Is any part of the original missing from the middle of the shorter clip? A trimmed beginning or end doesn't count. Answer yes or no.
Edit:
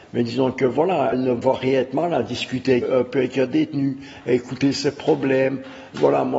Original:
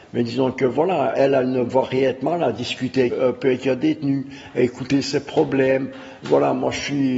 yes